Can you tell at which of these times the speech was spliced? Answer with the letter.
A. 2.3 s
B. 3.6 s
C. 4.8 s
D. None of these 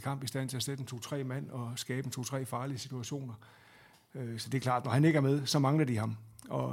D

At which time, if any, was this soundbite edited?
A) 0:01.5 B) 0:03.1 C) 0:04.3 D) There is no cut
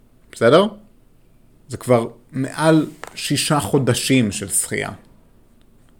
A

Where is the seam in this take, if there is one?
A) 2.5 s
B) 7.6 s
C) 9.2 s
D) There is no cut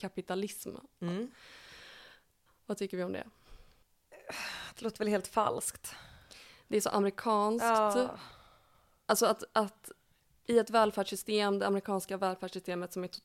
A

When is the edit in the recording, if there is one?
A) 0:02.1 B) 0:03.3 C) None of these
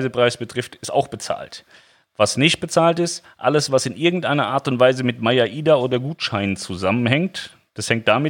C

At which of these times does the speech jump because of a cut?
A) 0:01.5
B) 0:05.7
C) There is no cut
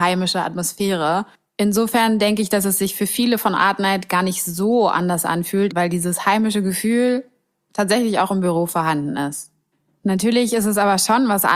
B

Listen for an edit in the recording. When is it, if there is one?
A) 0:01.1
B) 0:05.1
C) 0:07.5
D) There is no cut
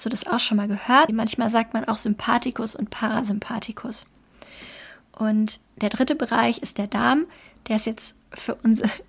A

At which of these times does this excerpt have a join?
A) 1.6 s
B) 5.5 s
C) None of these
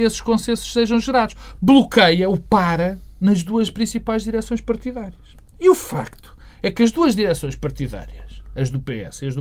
A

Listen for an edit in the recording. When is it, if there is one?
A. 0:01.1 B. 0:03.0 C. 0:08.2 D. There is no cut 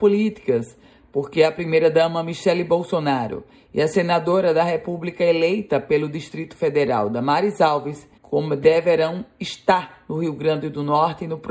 C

